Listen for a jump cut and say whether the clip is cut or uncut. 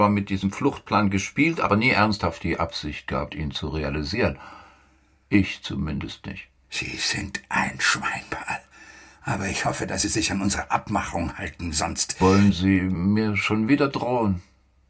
uncut